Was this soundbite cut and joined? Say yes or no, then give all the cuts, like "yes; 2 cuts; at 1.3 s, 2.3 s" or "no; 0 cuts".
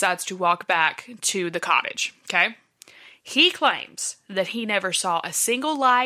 no; 0 cuts